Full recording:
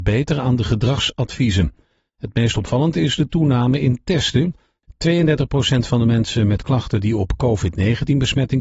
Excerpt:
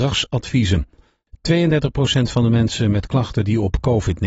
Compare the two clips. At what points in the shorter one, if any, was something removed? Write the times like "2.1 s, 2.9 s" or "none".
1.0 s